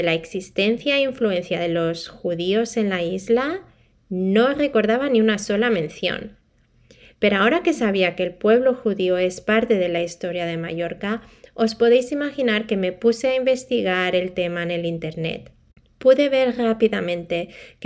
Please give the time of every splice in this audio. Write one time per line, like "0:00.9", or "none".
none